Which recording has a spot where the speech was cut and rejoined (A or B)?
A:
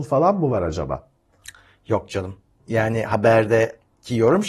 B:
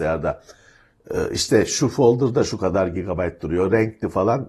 A